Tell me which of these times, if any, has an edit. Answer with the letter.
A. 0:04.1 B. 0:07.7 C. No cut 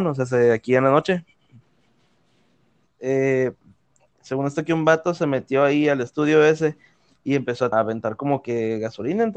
B